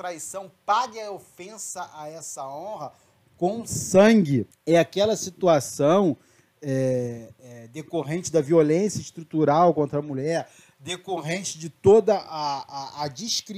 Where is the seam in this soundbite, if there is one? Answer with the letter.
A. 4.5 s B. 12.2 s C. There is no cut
A